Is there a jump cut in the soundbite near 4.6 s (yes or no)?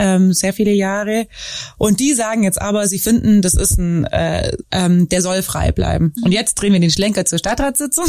yes